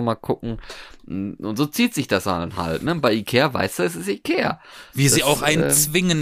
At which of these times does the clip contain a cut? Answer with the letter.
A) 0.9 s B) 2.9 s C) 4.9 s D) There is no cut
D